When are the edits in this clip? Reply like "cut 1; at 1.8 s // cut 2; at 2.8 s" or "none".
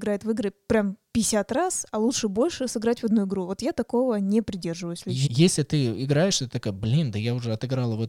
cut 1; at 5.2 s